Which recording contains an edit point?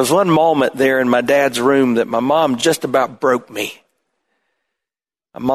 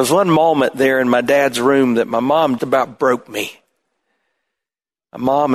second; 1 cut; at 2.6 s

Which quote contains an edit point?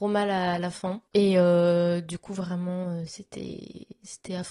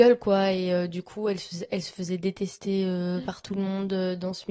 first; 1 cut; at 1.1 s

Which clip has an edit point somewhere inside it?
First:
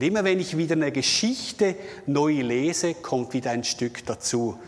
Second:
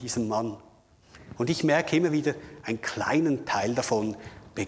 second; 1 cut; at 1.4 s

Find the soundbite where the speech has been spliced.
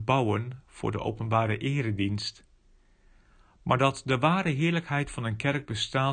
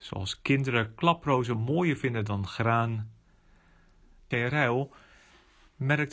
second; 1 cut; at 4.3 s

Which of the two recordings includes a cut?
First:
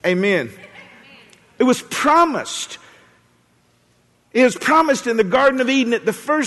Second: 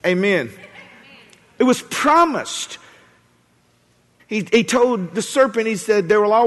second; 1 cut; at 4.2 s

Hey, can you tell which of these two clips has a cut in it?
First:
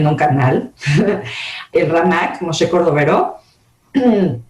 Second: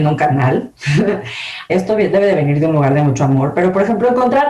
second; 1 cut; at 1.7 s

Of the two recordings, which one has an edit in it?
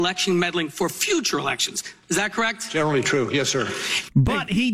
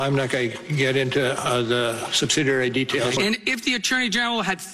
second; 1 cut; at 3.2 s

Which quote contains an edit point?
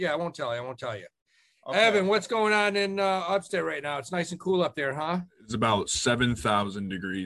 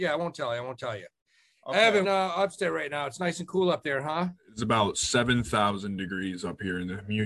second; 1 cut; at 2.0 s

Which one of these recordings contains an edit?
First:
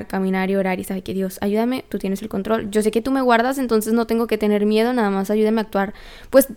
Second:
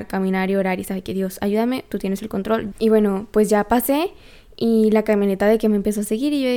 second; 1 cut; at 2.7 s

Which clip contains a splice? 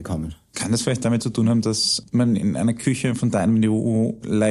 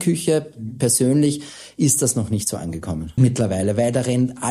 second; 1 cut; at 3.2 s

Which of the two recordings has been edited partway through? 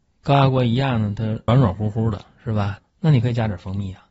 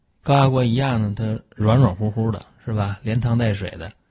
first; 2 cuts; at 1.5 s, 2.8 s

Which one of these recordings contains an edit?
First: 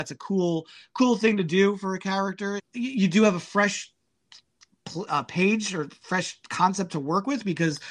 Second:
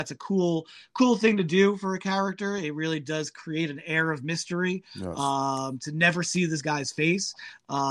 first; 2 cuts; at 2.6 s, 5.1 s

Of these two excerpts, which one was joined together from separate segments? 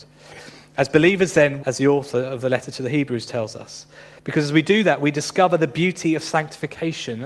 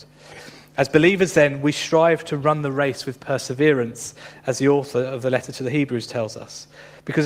first; 1 cut; at 1.6 s

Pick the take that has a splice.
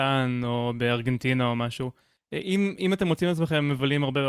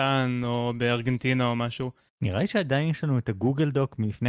second; 1 cut; at 2.1 s

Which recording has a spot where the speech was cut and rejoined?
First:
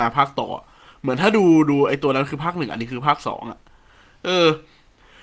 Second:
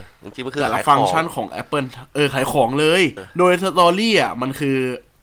second; 1 cut; at 3.2 s

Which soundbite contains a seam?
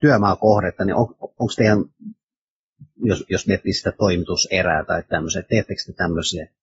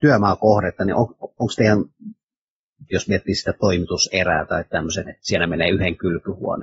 second; 2 cuts; at 2.9 s, 5.0 s

